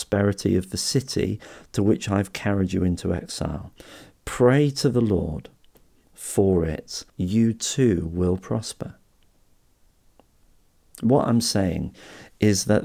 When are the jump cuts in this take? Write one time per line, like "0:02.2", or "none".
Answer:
0:07.1